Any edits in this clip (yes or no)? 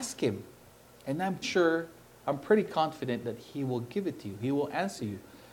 yes